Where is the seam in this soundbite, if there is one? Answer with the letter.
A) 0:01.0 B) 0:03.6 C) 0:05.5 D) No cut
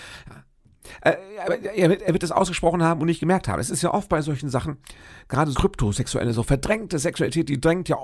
C